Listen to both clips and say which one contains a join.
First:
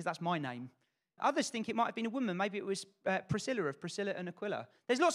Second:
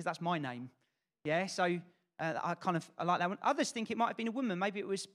first; 1 cut; at 1.2 s

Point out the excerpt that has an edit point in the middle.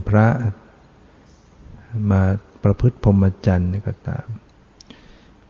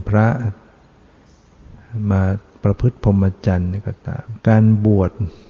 second; 1 cut; at 4.4 s

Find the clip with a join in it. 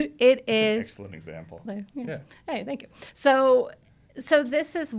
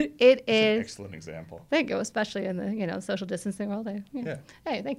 first; 1 cut; at 1.7 s

